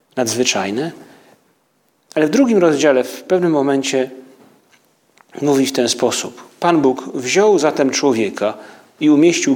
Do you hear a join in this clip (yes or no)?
no